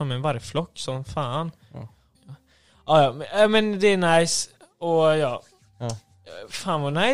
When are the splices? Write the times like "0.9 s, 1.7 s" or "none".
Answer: 2.1 s